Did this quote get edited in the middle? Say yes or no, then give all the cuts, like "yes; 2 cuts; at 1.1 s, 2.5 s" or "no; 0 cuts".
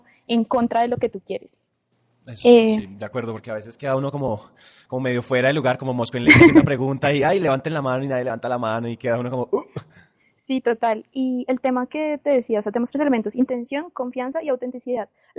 no; 0 cuts